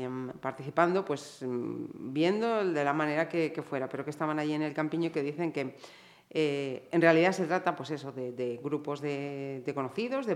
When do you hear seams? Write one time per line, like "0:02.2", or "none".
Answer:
none